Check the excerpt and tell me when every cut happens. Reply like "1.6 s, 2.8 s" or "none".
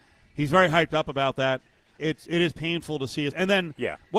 2.0 s, 3.3 s